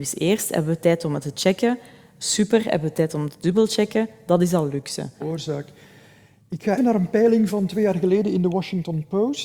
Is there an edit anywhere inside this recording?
yes; 2 cuts; at 5.2 s, 6.8 s

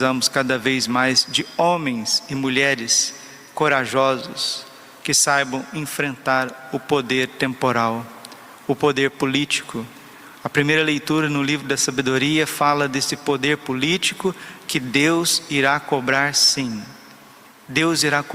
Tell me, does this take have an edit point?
no; 0 cuts

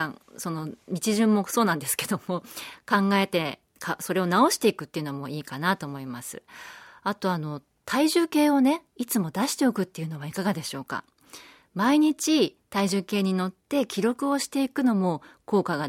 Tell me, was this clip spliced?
no; 0 cuts

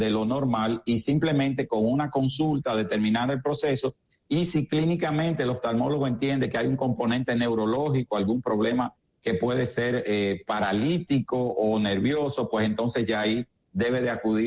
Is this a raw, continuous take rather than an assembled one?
yes; 0 cuts

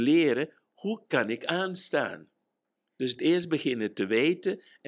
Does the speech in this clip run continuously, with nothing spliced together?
yes; 0 cuts

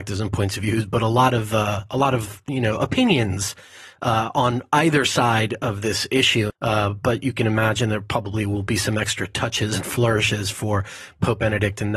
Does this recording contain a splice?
yes; 1 cut; at 6.5 s

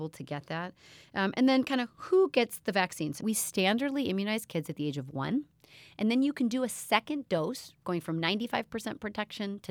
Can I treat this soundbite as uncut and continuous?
no; 1 cut; at 3.2 s

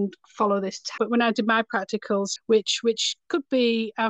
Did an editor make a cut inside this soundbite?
yes; 2 cuts; at 1.0 s, 2.4 s

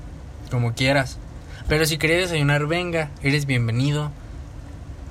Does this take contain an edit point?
no; 0 cuts

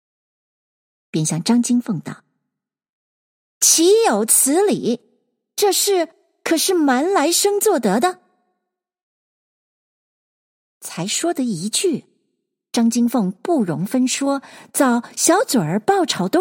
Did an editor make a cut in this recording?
no; 0 cuts

